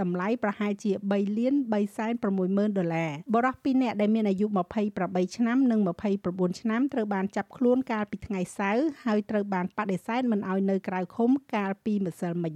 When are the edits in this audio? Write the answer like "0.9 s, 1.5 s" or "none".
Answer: 3.3 s